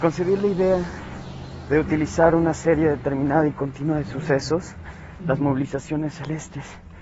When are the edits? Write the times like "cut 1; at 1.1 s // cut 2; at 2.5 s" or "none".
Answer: cut 1; at 5.2 s